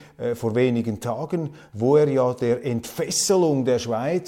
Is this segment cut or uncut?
uncut